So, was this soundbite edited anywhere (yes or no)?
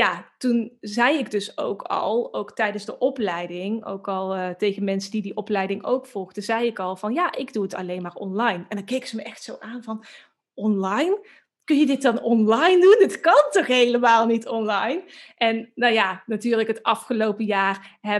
no